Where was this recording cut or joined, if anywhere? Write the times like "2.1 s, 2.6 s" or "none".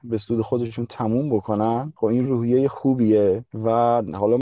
2.2 s